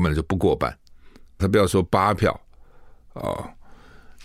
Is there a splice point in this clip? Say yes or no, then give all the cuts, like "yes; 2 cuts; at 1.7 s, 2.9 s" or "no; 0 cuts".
yes; 1 cut; at 1.4 s